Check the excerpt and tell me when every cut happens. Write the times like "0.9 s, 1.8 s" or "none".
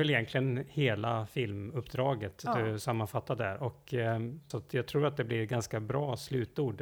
4.5 s